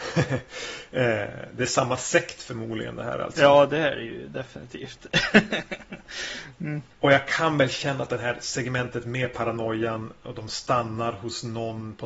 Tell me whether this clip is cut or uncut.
cut